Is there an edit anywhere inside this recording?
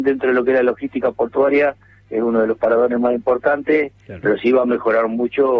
yes; 1 cut; at 4.2 s

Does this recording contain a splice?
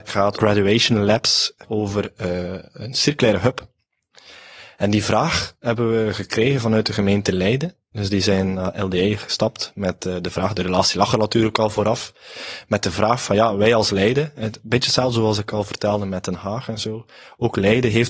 no; 0 cuts

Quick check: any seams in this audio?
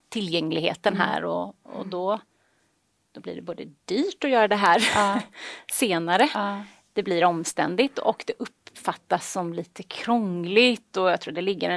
no; 0 cuts

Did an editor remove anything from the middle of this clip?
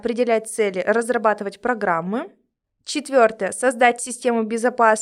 no; 0 cuts

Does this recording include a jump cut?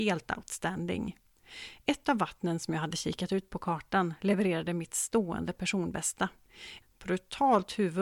yes; 1 cut; at 6.8 s

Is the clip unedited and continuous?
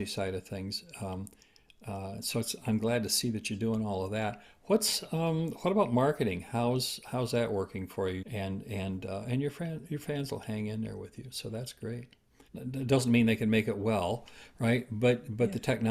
no; 2 cuts; at 8.2 s, 12.5 s

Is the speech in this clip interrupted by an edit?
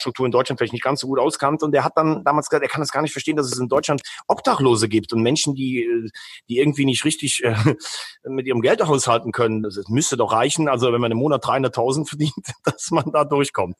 no; 0 cuts

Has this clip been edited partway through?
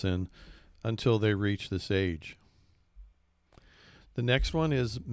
no; 0 cuts

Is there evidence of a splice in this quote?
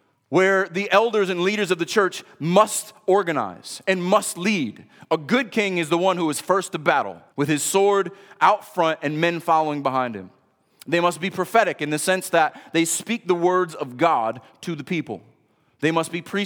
yes; 1 cut; at 7.3 s

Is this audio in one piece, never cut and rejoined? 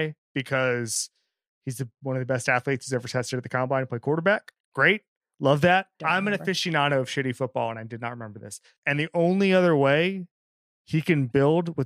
no; 3 cuts; at 4.6 s, 6.0 s, 8.8 s

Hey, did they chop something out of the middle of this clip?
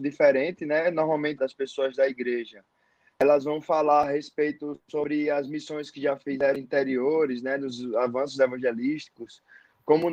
yes; 1 cut; at 1.4 s

